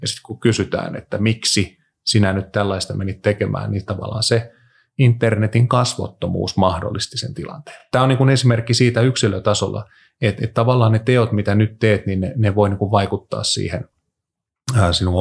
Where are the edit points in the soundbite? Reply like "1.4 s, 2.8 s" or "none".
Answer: none

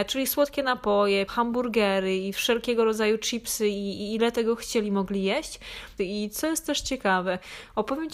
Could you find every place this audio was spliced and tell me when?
1.3 s, 6.0 s

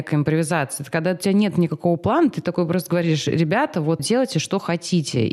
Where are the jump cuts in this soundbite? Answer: 4.0 s

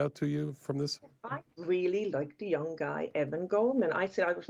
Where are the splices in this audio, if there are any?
none

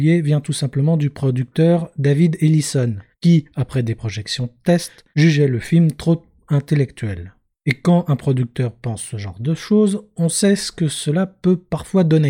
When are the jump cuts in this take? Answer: none

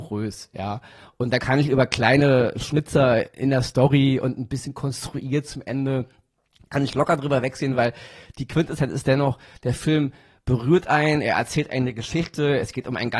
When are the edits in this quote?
none

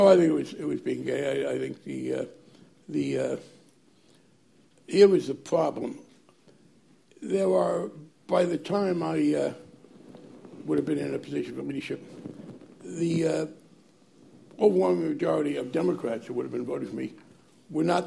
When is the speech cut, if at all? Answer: none

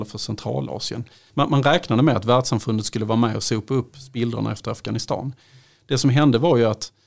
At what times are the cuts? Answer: 1.3 s

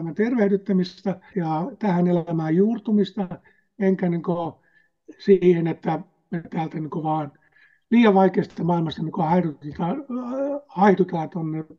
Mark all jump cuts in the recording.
1.3 s

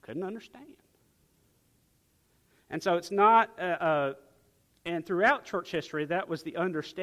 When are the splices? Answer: none

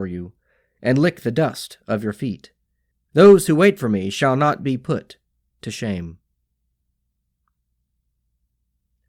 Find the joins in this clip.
2.9 s

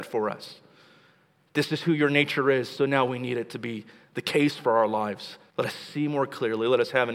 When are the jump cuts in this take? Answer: 5.5 s

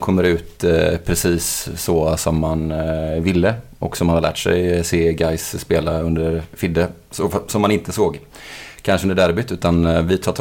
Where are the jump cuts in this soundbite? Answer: none

